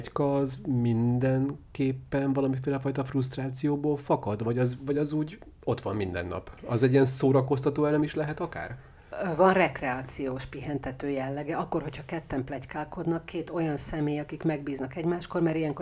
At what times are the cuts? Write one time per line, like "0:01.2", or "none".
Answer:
none